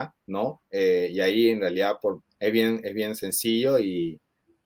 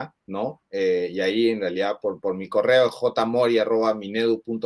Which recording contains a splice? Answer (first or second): first